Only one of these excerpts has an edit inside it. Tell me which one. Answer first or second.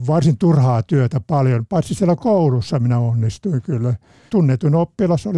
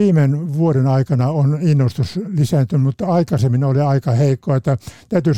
first